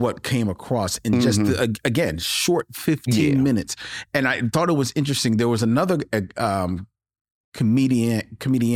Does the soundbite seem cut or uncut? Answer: uncut